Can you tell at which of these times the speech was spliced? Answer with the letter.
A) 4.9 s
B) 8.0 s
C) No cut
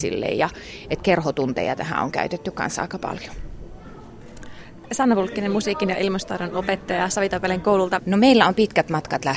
B